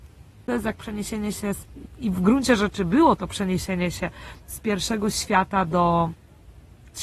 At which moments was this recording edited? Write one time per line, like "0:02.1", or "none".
none